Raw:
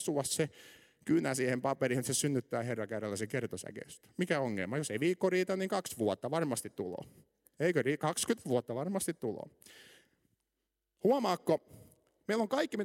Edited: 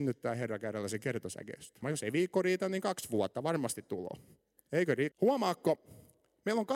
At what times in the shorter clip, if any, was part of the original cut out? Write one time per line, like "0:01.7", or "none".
0:01.8
0:05.1